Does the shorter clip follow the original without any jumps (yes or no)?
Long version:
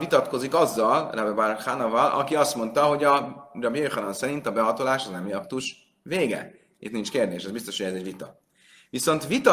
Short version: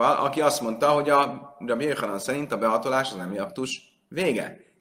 yes